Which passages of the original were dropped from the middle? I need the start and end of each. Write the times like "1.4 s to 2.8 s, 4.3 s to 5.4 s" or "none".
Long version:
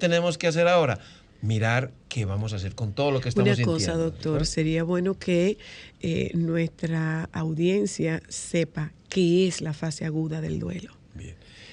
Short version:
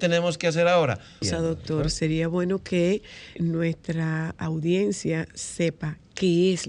1.2 s to 3.8 s, 5.9 s to 6.3 s